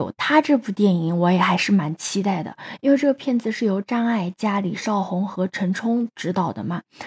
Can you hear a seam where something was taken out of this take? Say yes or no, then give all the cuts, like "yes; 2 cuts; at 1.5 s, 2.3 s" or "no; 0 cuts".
no; 0 cuts